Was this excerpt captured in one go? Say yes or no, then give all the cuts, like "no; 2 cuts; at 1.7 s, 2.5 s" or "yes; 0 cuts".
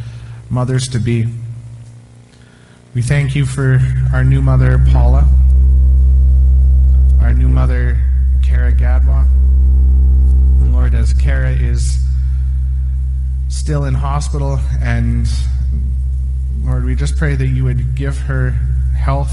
yes; 0 cuts